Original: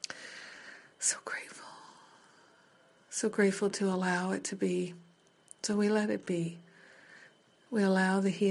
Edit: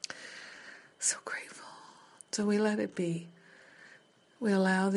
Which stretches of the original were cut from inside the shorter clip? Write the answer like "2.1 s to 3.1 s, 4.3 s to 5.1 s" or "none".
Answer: 2.2 s to 5.5 s